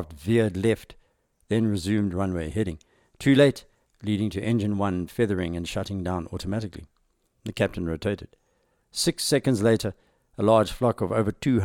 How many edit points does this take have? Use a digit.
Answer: 2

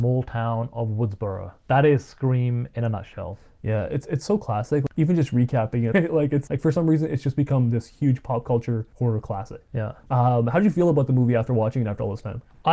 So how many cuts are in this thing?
1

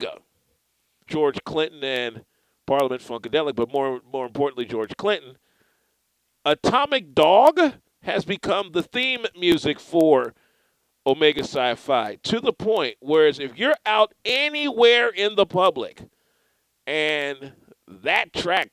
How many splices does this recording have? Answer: 1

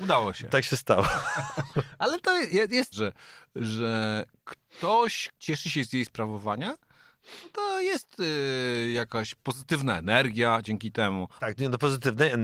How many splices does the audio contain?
3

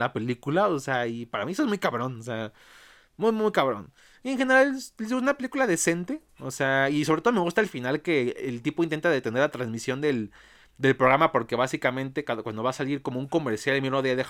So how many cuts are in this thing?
0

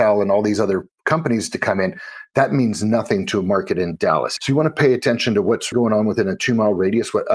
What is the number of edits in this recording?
2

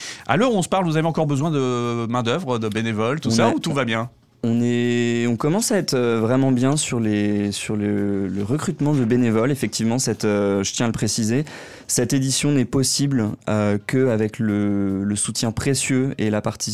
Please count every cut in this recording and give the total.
0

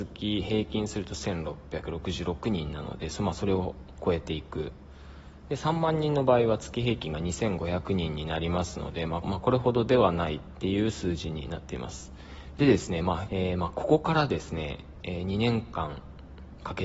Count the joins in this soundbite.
2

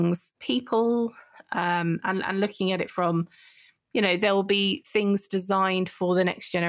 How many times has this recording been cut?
0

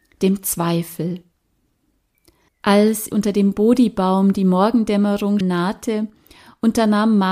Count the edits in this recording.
2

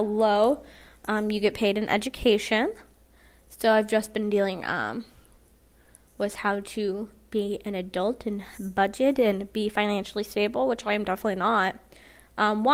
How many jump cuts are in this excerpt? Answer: 0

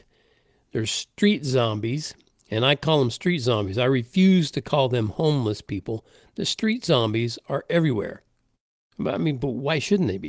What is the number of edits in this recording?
0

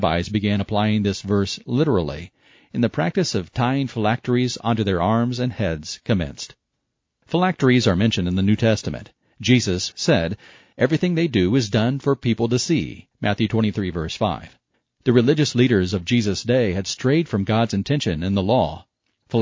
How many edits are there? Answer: 2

